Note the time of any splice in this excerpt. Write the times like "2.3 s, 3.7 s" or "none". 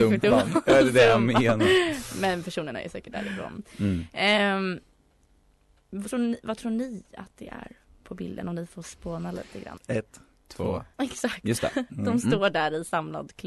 6.1 s, 9.8 s, 10.9 s